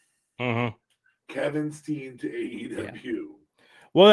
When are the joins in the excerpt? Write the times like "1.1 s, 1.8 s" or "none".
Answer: none